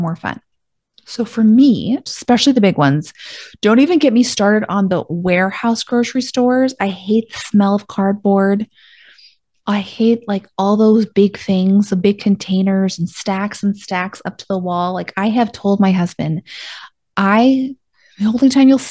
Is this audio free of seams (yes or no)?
no